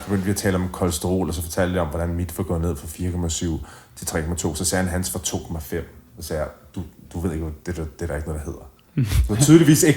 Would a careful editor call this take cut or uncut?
uncut